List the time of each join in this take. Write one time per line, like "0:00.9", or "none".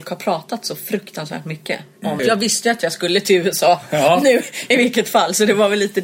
0:02.2